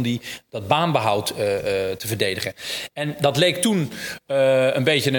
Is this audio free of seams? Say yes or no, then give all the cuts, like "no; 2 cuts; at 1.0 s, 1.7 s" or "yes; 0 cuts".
yes; 0 cuts